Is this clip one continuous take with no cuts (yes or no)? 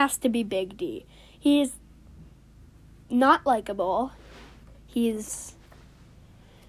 yes